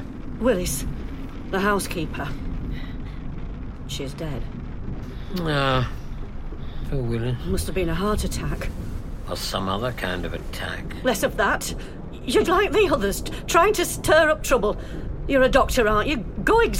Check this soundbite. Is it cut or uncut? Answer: cut